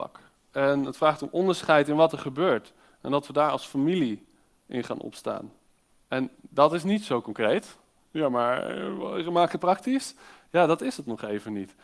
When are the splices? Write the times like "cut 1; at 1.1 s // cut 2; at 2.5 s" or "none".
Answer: cut 1; at 6.0 s